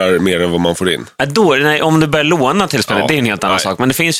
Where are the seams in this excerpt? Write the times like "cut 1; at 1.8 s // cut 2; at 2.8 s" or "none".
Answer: none